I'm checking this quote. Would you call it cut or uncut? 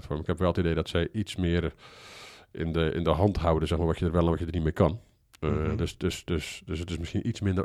uncut